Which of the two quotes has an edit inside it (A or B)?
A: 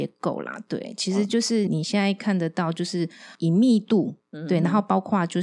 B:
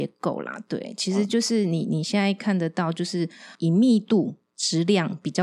A